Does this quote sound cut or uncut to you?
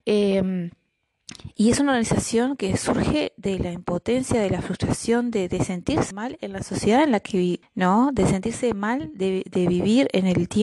cut